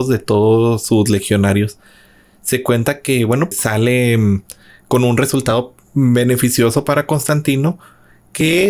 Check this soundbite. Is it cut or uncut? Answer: cut